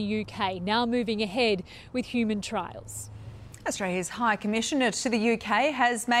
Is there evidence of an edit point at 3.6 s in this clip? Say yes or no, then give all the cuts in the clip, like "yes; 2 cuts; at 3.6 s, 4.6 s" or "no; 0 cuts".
no; 0 cuts